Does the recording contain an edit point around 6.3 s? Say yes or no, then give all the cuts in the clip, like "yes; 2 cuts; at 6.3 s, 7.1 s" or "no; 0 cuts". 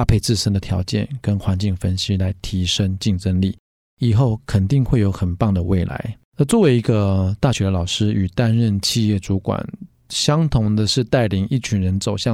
yes; 1 cut; at 6.3 s